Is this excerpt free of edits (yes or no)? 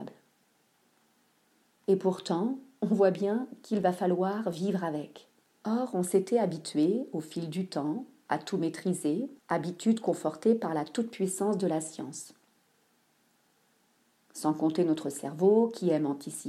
no